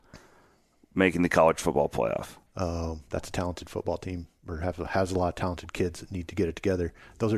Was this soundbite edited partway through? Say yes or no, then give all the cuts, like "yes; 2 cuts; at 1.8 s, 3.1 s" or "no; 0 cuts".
yes; 1 cut; at 2.5 s